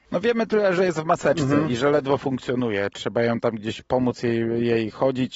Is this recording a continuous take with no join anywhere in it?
yes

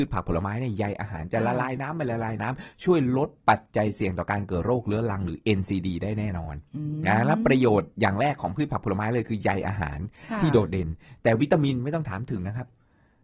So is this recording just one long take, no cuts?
yes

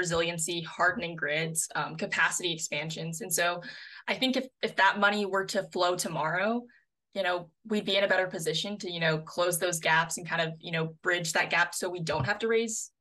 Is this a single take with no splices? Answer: yes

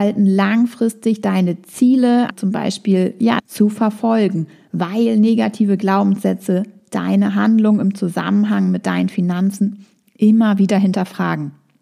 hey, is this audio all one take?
no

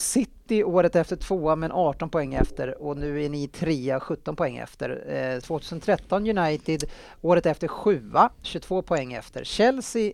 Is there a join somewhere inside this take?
yes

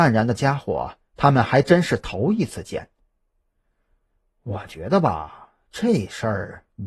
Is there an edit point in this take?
no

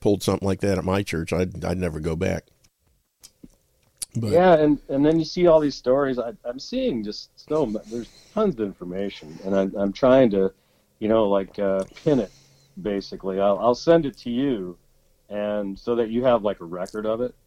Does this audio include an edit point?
no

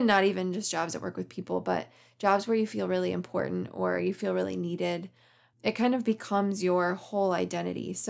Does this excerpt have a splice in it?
yes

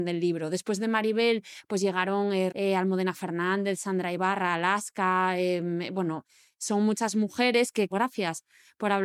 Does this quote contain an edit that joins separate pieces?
yes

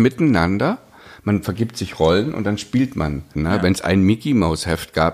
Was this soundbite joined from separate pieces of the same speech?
yes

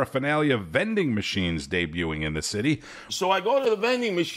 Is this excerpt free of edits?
no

